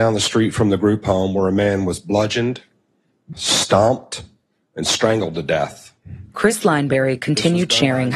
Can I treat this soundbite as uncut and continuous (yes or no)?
no